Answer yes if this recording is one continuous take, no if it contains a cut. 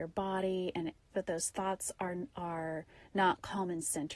no